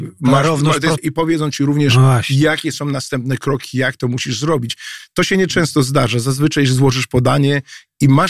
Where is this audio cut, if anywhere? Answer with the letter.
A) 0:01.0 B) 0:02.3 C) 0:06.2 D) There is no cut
A